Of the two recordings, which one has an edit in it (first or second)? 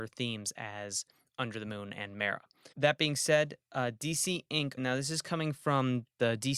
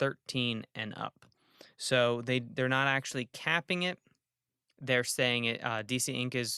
first